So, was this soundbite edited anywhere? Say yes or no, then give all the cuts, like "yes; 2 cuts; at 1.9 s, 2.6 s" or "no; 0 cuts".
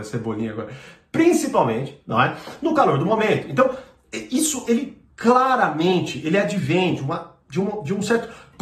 no; 0 cuts